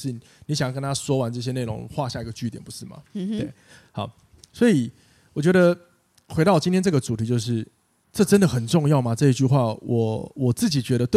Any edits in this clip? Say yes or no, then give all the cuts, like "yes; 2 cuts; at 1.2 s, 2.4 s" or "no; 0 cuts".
no; 0 cuts